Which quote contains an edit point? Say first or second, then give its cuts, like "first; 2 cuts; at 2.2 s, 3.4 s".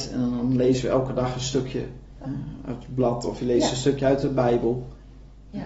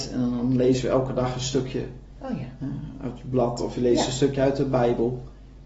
first; 1 cut; at 2.2 s